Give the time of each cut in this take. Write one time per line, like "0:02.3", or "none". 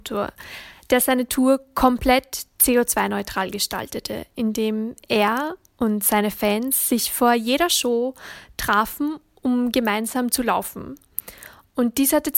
none

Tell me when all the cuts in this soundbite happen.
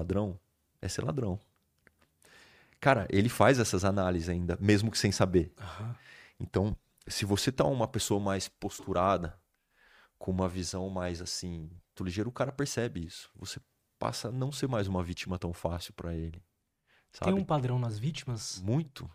0:12.0

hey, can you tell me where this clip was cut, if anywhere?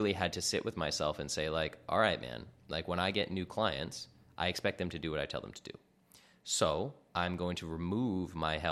none

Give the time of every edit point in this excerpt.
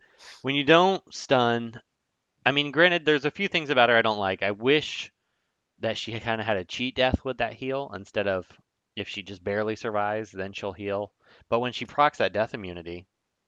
none

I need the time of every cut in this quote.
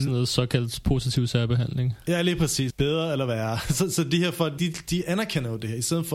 0:02.7
0:04.6

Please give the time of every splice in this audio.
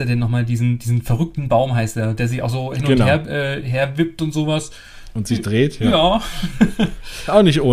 none

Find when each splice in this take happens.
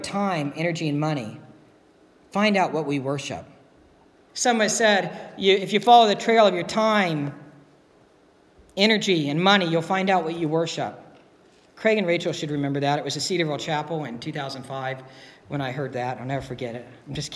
0:04.3
0:11.6

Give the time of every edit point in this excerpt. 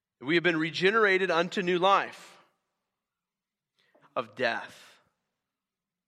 0:04.0

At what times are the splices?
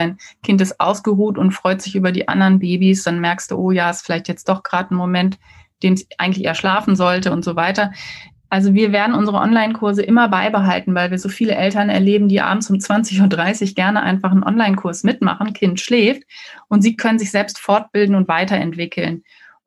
none

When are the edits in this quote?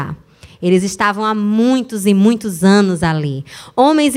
none

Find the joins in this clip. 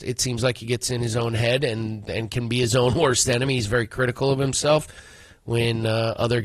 none

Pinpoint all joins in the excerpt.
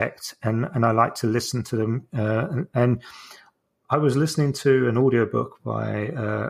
none

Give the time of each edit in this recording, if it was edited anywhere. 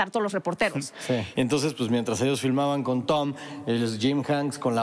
0:01.3

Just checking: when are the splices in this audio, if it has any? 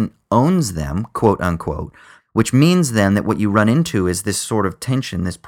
0:02.2

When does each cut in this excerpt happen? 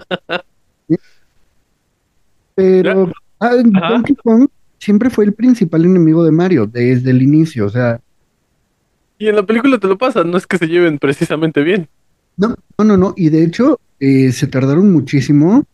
0:12.8

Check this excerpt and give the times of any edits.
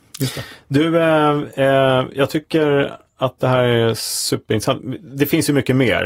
none

